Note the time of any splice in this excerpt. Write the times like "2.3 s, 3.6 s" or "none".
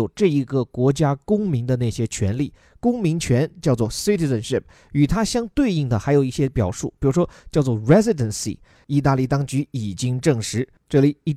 8.8 s